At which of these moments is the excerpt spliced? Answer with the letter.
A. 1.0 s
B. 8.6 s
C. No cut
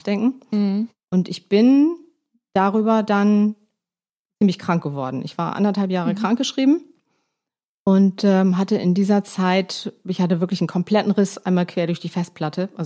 A